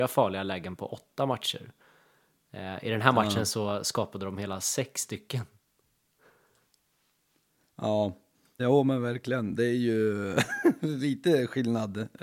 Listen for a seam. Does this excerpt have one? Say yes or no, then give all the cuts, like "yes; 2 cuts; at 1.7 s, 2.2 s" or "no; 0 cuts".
yes; 1 cut; at 8.6 s